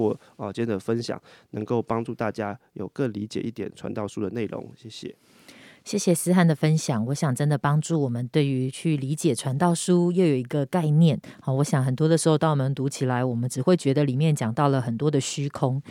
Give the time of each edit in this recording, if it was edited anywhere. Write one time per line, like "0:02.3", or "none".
none